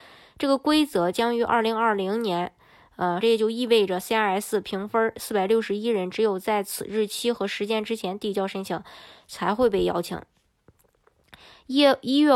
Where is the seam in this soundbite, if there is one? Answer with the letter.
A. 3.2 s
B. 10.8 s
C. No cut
A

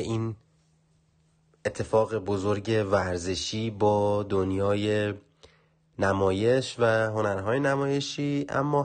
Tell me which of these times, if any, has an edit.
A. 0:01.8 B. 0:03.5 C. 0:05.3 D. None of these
D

